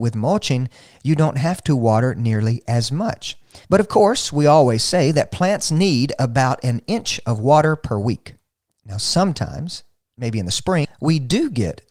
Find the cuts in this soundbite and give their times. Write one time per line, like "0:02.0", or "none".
0:03.6
0:10.8